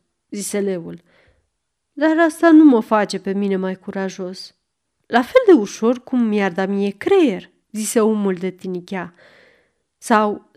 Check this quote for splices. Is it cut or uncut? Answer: cut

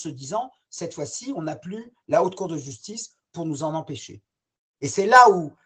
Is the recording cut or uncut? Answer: uncut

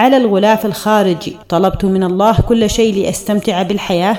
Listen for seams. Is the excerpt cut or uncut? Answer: cut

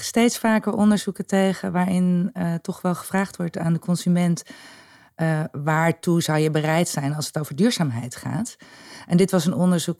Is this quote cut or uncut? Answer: uncut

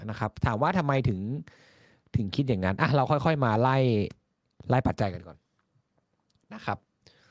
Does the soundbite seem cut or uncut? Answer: uncut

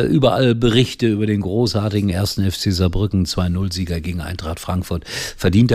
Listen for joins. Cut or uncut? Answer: uncut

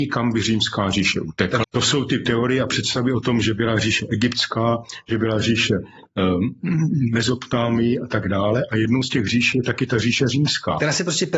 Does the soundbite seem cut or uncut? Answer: cut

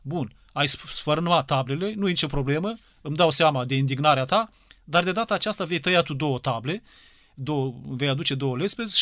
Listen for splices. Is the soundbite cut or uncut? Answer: uncut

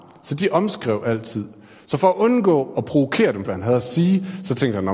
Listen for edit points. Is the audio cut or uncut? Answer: cut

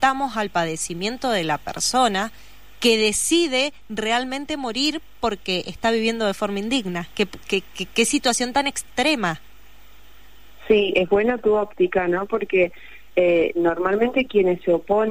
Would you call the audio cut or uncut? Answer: uncut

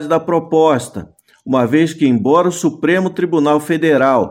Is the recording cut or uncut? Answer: uncut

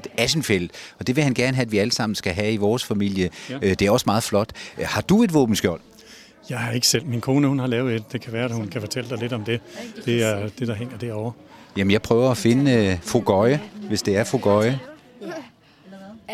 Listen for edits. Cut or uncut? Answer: uncut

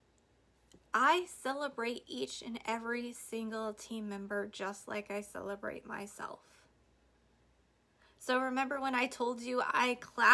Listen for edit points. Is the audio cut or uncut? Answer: uncut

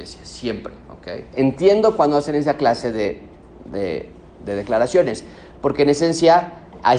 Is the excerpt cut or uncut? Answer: cut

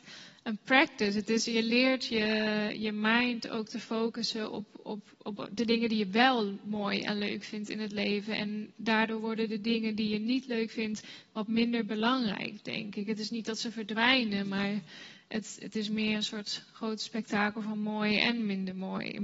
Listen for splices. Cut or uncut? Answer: uncut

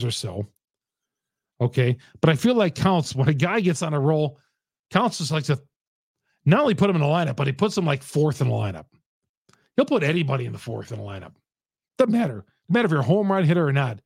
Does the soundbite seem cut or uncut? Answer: uncut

